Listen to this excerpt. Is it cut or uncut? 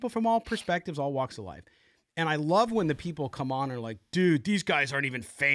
uncut